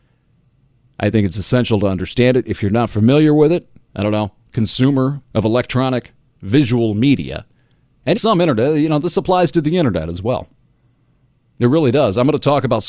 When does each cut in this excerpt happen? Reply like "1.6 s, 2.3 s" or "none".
3.8 s, 5.3 s, 8.1 s